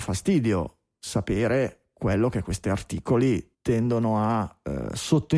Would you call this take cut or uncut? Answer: cut